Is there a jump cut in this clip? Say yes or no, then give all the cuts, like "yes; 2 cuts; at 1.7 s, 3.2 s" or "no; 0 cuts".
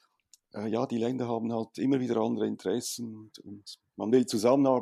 no; 0 cuts